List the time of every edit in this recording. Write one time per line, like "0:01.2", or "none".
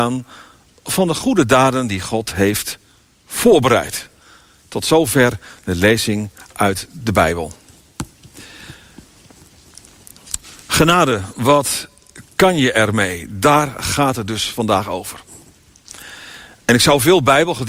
none